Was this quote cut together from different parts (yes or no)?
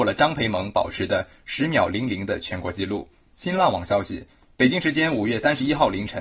yes